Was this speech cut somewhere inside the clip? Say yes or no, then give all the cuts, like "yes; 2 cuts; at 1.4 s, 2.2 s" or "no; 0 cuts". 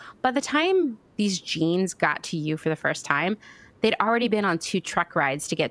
no; 0 cuts